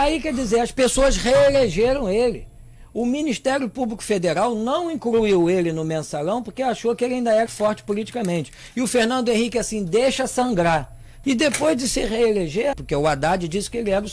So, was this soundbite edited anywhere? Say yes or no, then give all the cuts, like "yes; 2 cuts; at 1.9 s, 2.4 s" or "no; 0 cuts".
yes; 3 cuts; at 7.5 s, 11.2 s, 12.7 s